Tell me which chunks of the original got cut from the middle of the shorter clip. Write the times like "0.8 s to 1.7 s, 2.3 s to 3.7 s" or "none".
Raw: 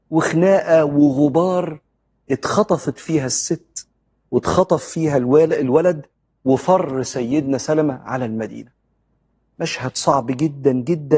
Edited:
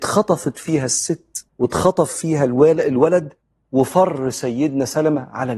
3.9 s to 4.2 s

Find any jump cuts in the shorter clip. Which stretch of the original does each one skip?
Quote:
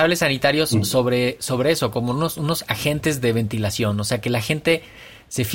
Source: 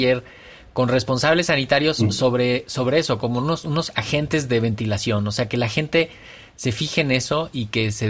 none

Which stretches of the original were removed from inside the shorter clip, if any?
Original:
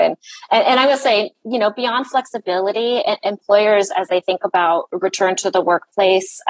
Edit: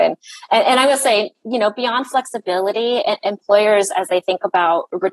none

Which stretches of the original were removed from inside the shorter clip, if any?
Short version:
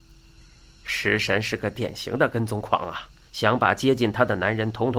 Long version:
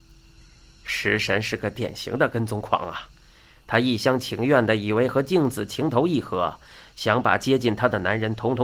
3.3 s to 6.9 s

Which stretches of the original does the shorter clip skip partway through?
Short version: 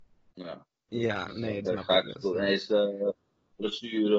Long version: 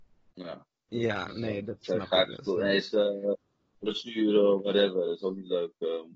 1.7 s to 1.9 s

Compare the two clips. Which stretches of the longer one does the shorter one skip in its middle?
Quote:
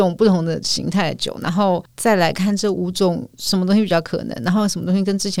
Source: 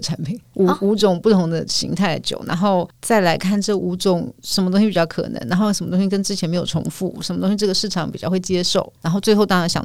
none

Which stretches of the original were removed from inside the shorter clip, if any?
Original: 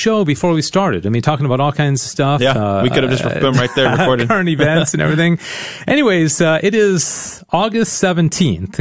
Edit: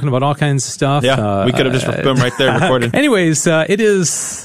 4.3 s to 5.8 s

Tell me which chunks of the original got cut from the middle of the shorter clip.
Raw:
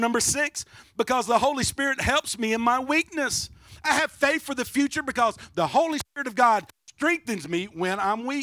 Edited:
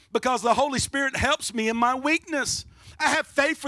none

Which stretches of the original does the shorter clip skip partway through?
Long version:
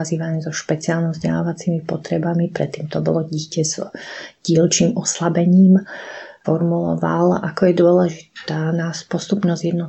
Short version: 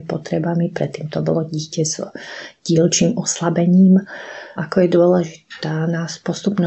6.3 s to 7.4 s

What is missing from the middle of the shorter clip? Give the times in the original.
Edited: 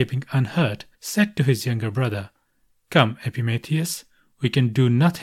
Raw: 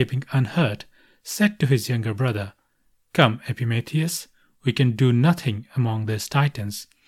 0.9 s to 1.2 s

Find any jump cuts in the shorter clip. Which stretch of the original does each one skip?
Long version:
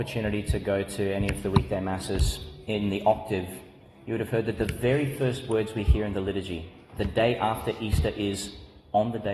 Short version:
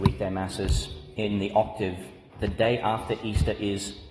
3.8 s to 6.9 s

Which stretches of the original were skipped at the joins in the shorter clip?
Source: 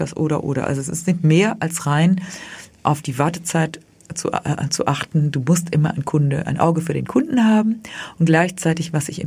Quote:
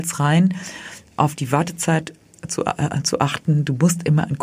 none

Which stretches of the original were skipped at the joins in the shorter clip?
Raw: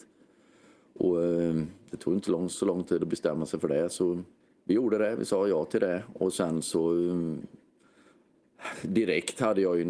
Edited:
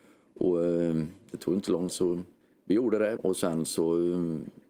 2.5 s to 3.9 s, 5.2 s to 6.1 s

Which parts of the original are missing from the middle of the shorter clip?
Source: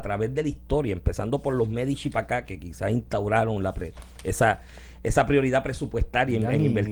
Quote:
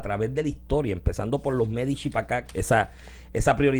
2.5 s to 4.2 s

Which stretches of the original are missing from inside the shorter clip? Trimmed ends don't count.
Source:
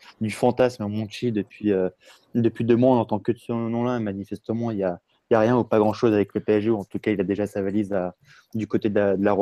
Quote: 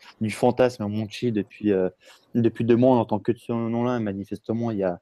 none

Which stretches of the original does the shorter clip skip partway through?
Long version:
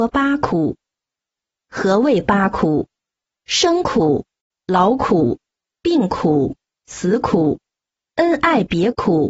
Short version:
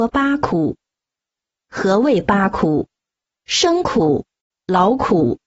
none

